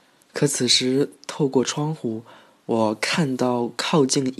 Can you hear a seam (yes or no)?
no